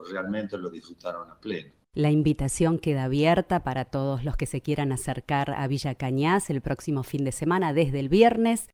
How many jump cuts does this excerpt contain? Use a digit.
1